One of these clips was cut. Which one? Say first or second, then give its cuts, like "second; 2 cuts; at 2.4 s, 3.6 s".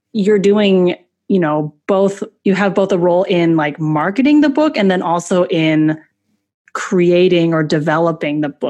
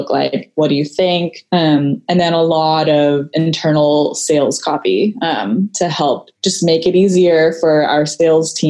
second; 2 cuts; at 1.5 s, 6.4 s